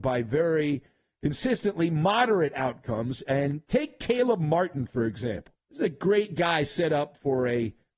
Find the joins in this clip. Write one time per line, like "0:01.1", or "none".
0:05.6